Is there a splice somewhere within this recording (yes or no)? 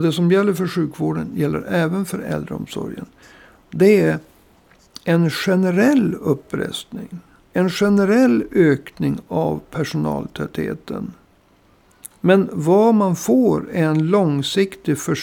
no